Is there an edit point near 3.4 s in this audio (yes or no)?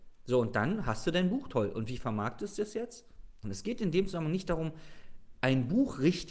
yes